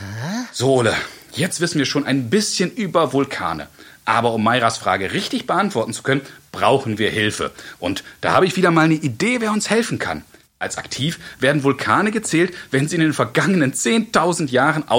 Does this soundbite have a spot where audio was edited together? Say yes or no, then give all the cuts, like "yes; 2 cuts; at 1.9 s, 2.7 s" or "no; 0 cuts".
yes; 1 cut; at 10.4 s